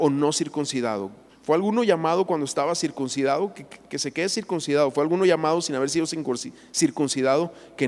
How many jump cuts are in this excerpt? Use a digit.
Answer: 1